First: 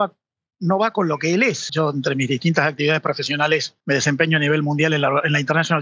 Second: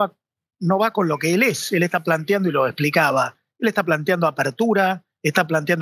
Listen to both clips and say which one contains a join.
first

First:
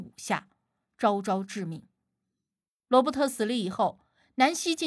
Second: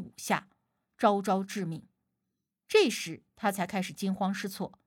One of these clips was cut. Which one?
second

